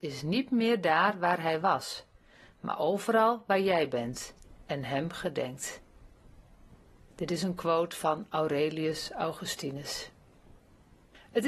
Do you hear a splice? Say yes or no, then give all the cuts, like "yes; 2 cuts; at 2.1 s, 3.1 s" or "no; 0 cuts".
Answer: no; 0 cuts